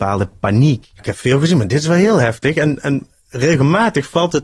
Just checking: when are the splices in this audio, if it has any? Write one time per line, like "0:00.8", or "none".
0:01.0